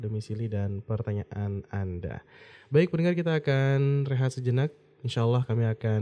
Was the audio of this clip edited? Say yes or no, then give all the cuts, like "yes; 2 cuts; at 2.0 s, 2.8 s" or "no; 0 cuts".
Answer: no; 0 cuts